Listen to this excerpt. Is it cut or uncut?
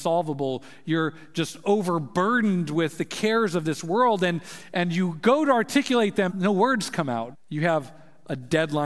cut